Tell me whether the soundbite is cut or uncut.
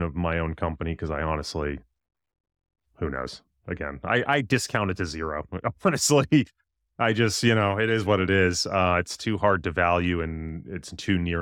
uncut